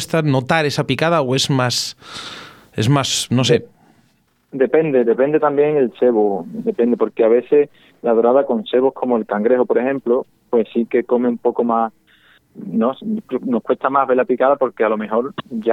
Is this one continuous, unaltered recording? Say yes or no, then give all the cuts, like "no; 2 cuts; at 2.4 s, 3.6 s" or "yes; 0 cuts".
yes; 0 cuts